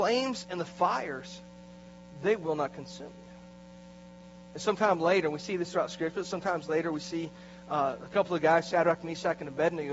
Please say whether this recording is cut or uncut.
uncut